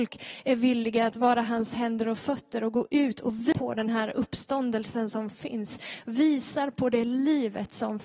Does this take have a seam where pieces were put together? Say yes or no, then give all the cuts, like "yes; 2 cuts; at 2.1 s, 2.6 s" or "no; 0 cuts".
no; 0 cuts